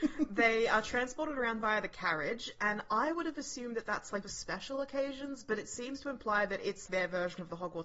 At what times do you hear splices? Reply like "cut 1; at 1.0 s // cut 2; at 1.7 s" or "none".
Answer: cut 1; at 4.2 s // cut 2; at 6.9 s

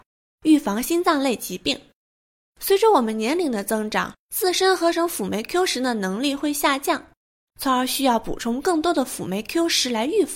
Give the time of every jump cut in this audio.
cut 1; at 7.5 s

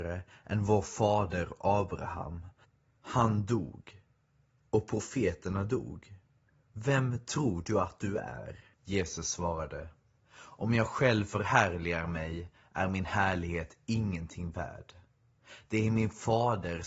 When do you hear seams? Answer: cut 1; at 8.7 s

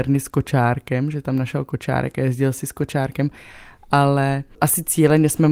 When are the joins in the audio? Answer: cut 1; at 4.5 s

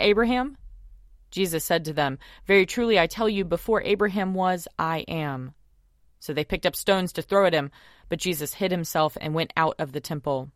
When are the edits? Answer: none

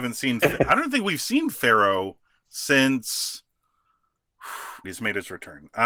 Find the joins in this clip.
cut 1; at 4.8 s

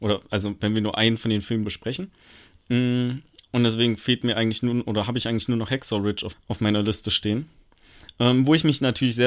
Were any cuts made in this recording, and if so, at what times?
cut 1; at 1.6 s // cut 2; at 6.3 s

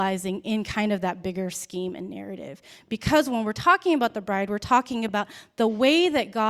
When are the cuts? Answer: none

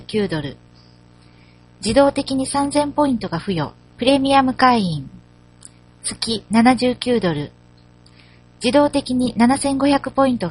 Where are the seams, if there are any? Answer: cut 1; at 3.9 s

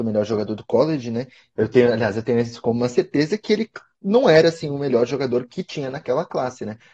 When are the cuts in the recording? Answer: cut 1; at 1.5 s

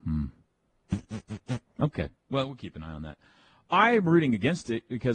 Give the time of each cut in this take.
none

